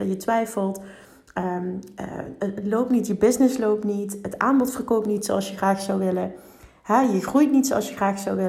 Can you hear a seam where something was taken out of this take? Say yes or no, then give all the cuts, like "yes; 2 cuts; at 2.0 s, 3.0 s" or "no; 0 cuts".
no; 0 cuts